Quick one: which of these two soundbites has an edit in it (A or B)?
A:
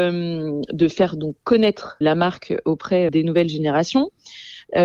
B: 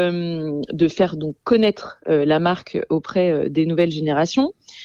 A